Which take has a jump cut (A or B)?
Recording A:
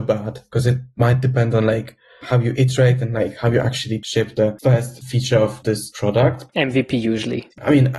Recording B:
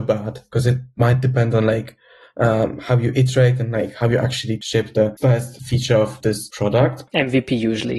A